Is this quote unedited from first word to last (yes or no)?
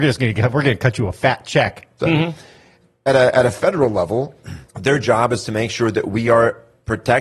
no